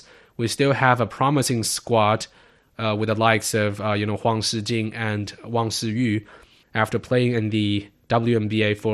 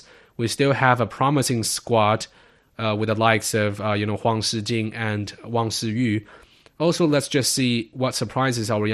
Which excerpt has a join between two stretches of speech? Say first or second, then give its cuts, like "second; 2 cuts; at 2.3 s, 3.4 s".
first; 1 cut; at 6.6 s